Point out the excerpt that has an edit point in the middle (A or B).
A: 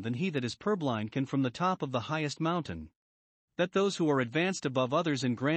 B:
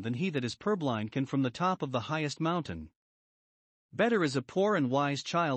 A